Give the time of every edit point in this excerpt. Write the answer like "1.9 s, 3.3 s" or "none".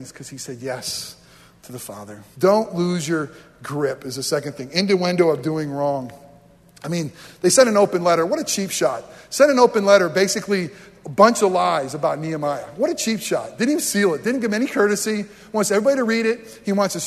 2.3 s